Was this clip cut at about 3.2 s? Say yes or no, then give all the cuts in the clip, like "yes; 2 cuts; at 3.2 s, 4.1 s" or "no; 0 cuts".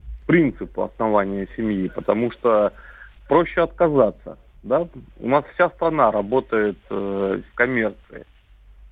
yes; 2 cuts; at 3.2 s, 7.5 s